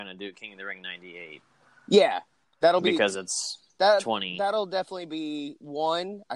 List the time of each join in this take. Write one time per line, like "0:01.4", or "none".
none